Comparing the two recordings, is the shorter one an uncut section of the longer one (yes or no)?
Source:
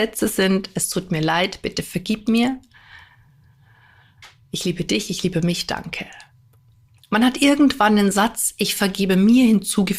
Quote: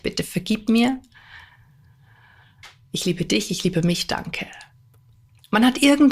yes